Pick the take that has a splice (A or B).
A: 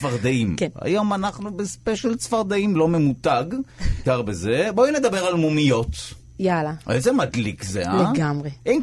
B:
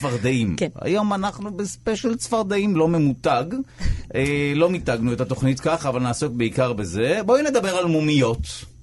A